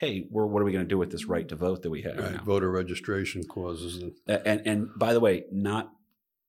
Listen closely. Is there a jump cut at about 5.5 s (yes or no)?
no